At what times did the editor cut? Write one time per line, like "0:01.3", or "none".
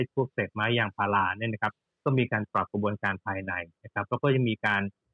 none